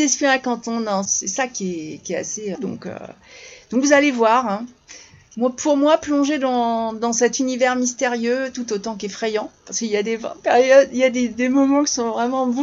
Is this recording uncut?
no; 2 cuts; at 1.0 s, 2.5 s

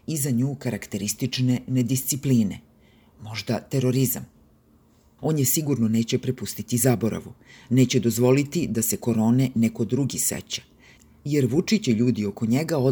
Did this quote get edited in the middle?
yes; 1 cut; at 5.2 s

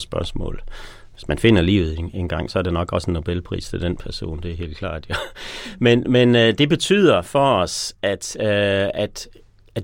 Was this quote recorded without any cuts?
yes; 0 cuts

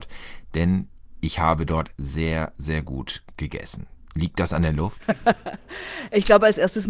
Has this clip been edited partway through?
yes; 1 cut; at 4.1 s

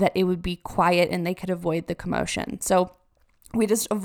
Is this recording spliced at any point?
no; 0 cuts

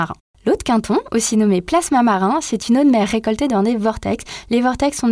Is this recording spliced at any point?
no; 0 cuts

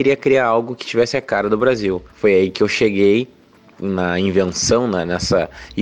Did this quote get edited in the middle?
yes; 1 cut; at 2.1 s

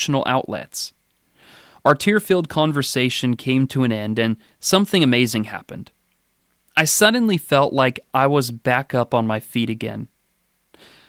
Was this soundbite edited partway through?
no; 0 cuts

